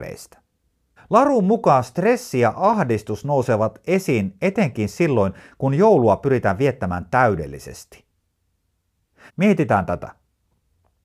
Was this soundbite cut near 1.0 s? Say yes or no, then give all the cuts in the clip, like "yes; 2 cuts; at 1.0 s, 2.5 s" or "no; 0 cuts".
yes; 2 cuts; at 1.0 s, 9.3 s